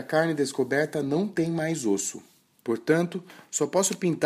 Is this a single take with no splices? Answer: no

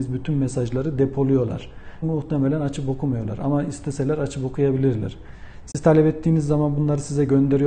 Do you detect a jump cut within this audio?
yes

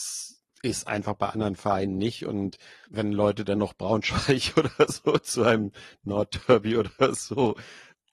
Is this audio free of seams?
no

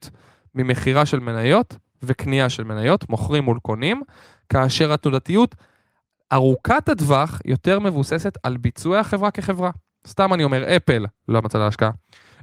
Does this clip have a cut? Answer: no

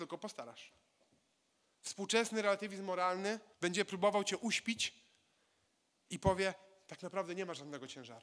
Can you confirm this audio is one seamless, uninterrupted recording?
no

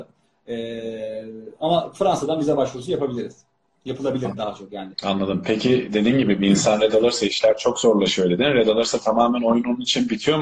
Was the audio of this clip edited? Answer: yes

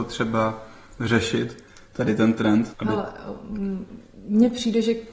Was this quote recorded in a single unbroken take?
no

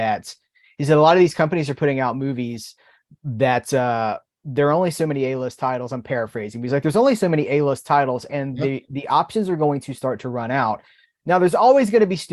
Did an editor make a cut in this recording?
no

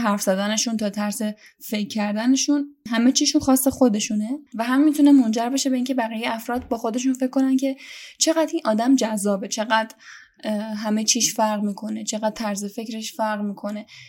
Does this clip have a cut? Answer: no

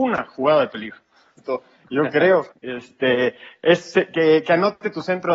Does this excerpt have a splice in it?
yes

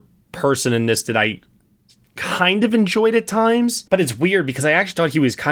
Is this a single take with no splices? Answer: no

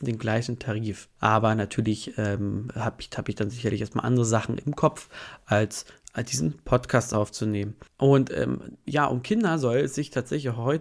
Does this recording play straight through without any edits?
no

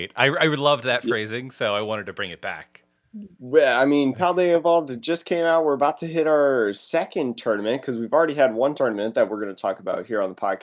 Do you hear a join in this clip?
no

